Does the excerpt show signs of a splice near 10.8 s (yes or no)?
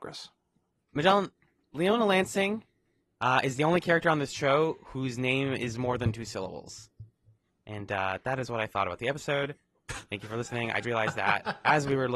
yes